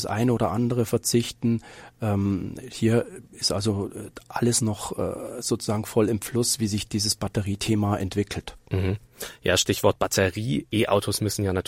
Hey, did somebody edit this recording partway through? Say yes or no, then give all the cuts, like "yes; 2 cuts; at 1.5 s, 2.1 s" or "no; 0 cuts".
no; 0 cuts